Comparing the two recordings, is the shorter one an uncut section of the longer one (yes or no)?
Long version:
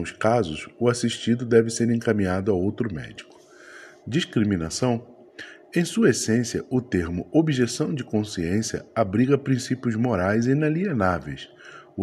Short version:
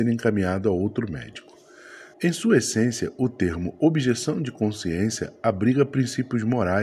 no